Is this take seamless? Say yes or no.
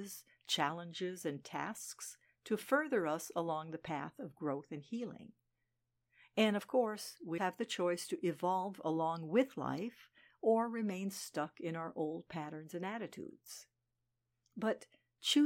no